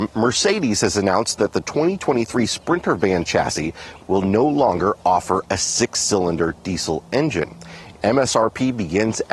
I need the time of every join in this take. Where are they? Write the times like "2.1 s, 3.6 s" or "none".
4.0 s, 7.9 s